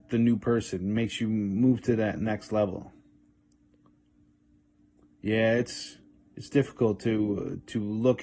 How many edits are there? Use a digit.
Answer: 0